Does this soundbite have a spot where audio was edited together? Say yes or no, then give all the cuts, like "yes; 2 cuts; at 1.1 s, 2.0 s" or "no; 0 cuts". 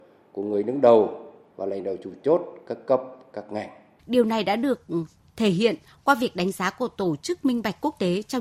yes; 1 cut; at 4.0 s